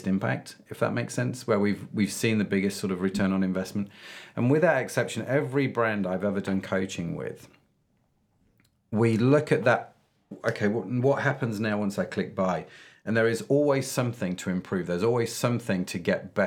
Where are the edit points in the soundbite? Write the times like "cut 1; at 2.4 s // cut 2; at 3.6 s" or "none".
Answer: none